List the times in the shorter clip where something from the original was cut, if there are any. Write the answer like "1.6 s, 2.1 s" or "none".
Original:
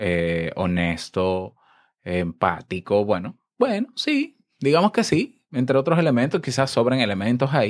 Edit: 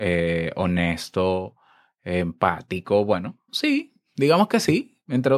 3.5 s